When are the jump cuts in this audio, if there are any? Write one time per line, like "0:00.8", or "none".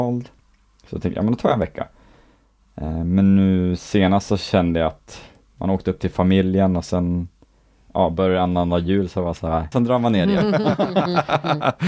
0:09.7